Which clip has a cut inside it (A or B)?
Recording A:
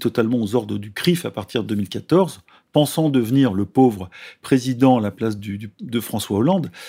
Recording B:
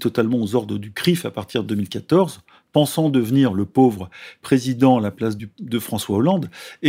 B